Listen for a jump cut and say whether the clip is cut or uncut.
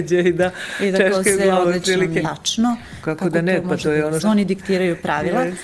cut